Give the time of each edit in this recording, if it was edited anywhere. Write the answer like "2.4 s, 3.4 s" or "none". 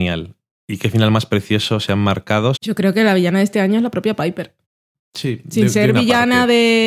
2.6 s